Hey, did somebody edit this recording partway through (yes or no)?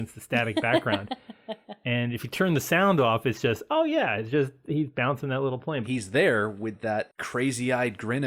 yes